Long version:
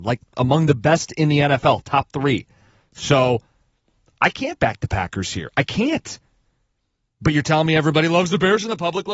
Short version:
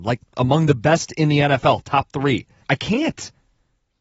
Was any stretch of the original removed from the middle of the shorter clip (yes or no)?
yes